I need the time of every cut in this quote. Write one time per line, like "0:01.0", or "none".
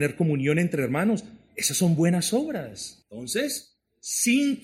0:03.0